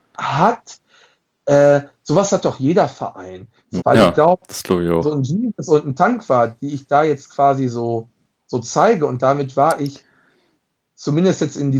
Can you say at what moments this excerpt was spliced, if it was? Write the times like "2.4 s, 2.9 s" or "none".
3.8 s